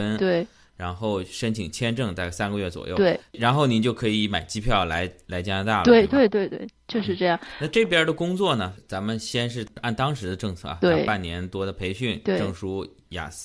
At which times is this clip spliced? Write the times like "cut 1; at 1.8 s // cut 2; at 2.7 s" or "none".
cut 1; at 8.8 s